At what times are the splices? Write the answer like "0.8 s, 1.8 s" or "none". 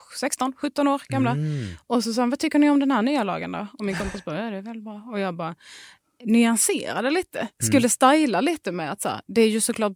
none